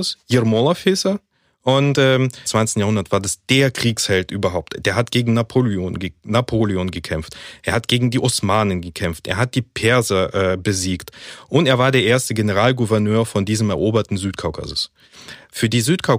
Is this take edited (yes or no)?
yes